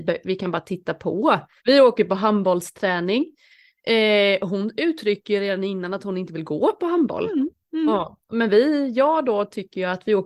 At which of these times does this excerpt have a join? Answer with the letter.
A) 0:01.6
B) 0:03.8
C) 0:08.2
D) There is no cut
A